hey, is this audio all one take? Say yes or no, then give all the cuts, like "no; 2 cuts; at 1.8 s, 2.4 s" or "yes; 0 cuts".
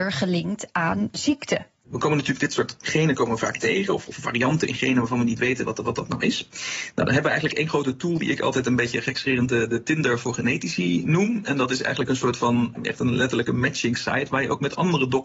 no; 1 cut; at 12.7 s